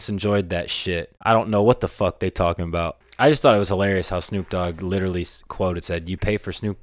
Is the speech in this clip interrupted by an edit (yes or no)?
yes